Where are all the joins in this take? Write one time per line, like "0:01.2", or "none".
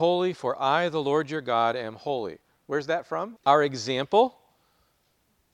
0:03.4